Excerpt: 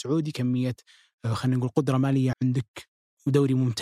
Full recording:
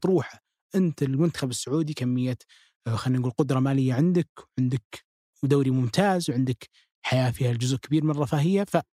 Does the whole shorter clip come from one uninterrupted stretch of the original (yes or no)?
no